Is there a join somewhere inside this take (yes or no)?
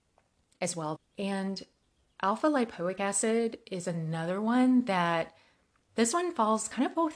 yes